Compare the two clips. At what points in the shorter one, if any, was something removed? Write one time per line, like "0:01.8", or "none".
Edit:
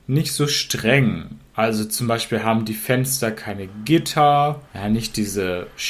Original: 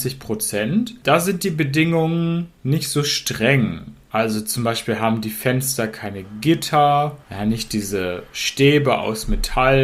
none